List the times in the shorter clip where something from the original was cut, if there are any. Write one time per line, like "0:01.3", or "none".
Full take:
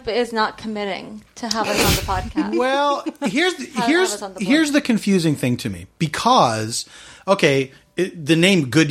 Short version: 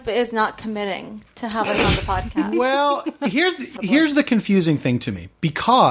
0:03.8